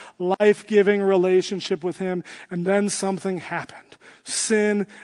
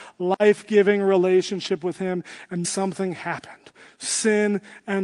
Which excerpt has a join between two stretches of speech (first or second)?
second